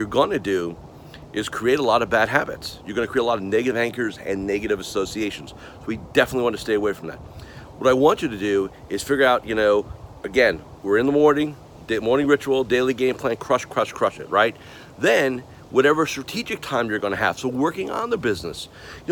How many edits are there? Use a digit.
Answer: 0